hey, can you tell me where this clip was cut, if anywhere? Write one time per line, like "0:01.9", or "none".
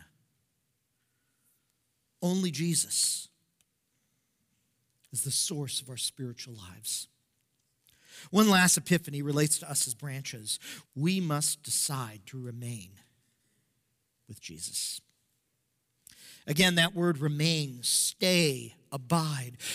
0:10.9